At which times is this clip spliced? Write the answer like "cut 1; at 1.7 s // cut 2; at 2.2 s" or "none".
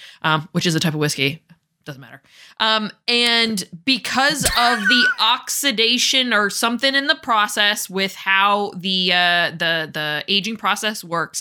none